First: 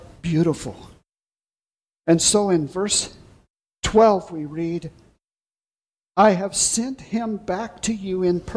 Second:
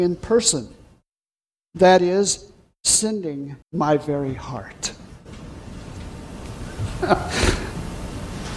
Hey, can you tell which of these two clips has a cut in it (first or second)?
second